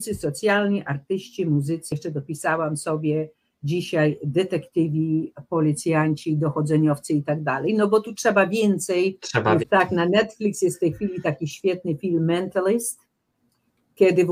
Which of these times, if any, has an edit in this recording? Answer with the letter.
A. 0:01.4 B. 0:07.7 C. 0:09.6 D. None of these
C